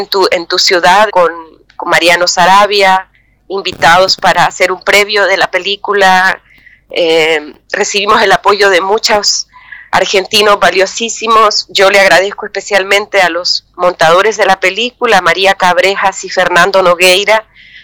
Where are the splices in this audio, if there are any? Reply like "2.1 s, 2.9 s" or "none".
1.1 s